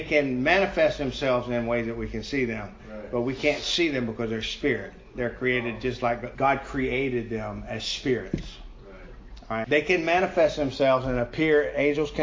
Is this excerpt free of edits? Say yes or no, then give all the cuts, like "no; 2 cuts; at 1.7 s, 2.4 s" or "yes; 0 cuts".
no; 2 cuts; at 6.4 s, 9.6 s